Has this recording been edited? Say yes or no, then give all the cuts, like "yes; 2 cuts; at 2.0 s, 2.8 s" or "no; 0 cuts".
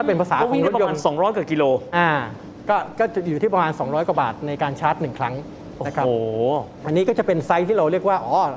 no; 0 cuts